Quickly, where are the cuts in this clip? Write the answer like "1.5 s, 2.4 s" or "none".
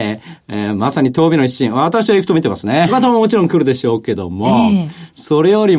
2.9 s